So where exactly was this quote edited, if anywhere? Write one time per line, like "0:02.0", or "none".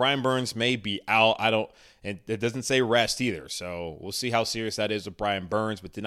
none

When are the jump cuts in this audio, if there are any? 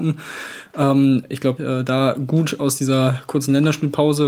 0:01.6

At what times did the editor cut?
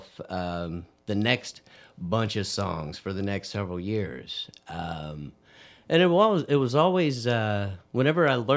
none

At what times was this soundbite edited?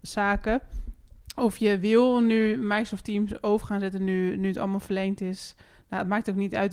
none

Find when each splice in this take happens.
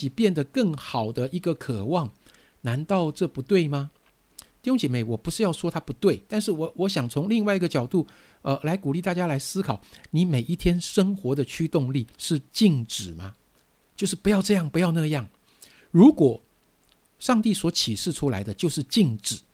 0:12.1

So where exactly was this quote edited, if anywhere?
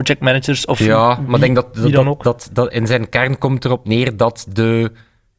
none

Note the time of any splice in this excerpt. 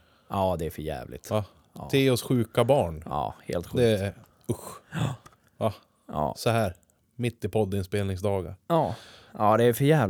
none

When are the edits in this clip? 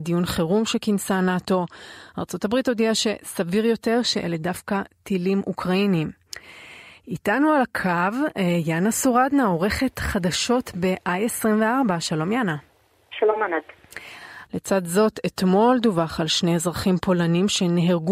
0:14.5

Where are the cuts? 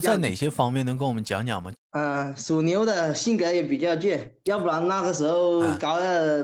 0:01.7

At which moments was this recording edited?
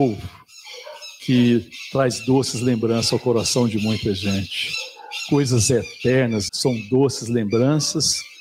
0:06.5

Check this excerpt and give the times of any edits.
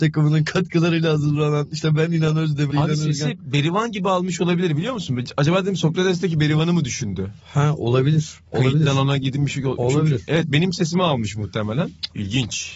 0:02.7

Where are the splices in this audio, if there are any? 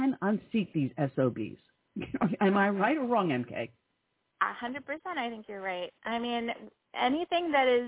none

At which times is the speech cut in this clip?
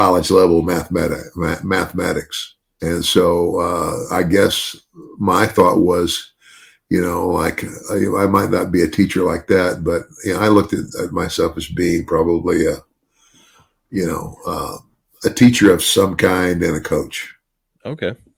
0:02.8

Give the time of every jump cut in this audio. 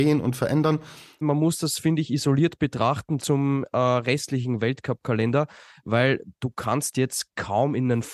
0:01.2
0:03.2

